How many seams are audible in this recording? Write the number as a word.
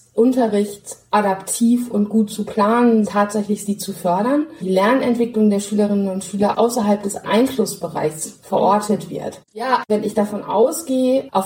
three